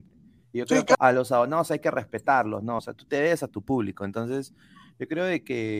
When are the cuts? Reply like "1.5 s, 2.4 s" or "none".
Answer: 0.9 s, 2.8 s